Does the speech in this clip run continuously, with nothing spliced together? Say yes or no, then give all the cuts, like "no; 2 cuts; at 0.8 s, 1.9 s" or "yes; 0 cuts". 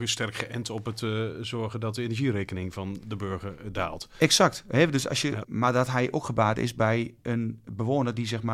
no; 1 cut; at 5.4 s